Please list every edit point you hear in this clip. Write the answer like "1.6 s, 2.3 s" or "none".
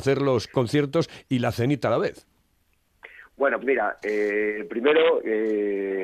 3.6 s